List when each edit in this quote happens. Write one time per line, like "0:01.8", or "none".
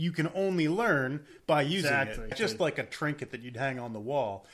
0:02.3